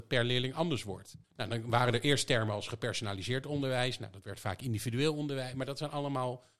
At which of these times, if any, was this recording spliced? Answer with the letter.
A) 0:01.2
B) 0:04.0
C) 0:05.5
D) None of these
A